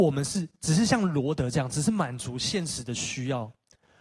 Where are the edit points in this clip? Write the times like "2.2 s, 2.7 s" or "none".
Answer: none